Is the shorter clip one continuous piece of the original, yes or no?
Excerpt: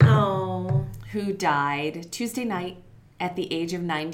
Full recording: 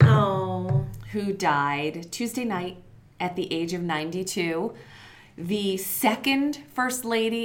yes